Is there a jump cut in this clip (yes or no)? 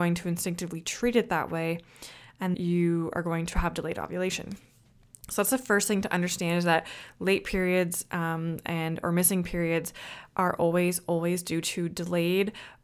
yes